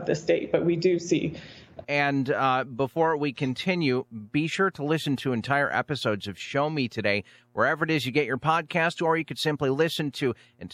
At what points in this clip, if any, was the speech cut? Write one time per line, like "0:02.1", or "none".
0:01.8